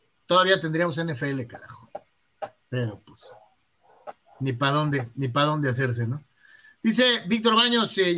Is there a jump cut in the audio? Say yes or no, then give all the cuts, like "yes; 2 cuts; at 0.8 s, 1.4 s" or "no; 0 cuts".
no; 0 cuts